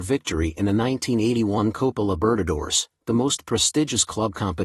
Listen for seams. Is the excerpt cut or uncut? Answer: uncut